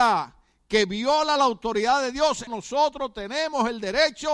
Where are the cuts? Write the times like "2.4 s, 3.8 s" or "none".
2.5 s